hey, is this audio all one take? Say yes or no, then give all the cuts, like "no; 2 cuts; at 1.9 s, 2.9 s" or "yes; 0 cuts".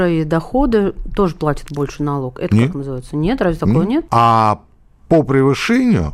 no; 1 cut; at 4.1 s